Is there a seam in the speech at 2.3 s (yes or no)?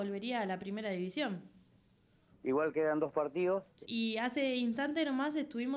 yes